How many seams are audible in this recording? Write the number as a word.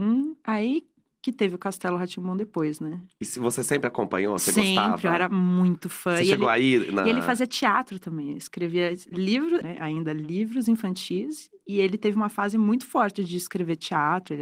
one